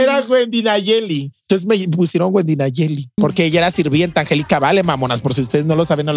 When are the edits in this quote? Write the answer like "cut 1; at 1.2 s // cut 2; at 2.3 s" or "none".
cut 1; at 3.2 s